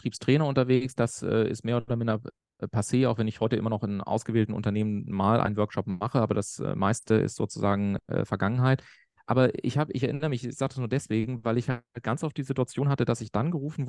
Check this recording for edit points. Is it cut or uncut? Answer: uncut